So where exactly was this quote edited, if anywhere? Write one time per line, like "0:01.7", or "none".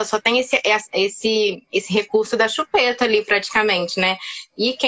none